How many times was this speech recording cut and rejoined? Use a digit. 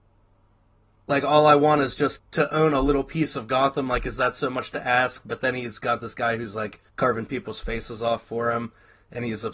2